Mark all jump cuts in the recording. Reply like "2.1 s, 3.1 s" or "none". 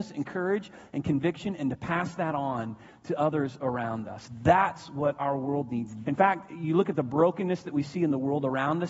6.0 s